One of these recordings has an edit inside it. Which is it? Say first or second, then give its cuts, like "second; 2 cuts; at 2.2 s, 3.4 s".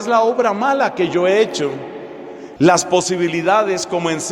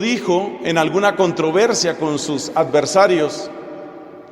first; 1 cut; at 2.6 s